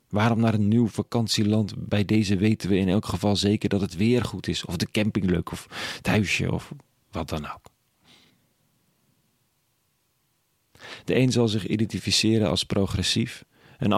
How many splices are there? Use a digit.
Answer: 0